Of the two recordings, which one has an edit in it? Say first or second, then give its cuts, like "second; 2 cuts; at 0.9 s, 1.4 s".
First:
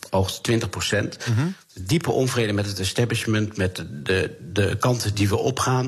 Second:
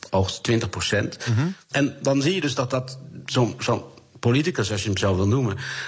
second; 1 cut; at 1.7 s